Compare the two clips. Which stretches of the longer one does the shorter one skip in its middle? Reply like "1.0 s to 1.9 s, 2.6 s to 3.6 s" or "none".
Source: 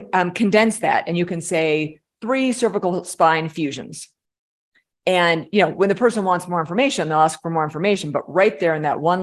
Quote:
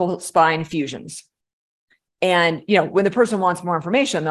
none